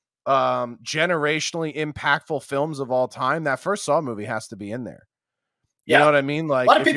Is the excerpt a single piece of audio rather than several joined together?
yes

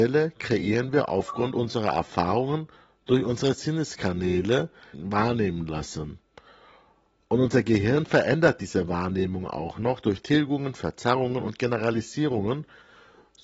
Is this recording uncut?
no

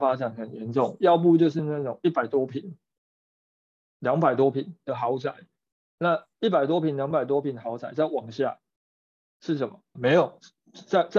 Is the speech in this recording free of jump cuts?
no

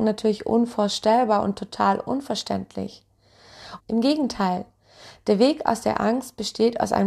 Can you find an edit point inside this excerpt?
yes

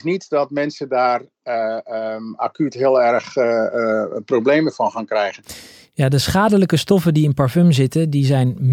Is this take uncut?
yes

